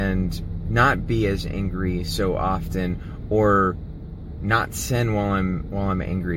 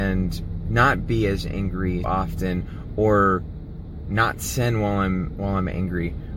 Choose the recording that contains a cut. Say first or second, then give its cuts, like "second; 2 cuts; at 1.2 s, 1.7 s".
second; 1 cut; at 2.0 s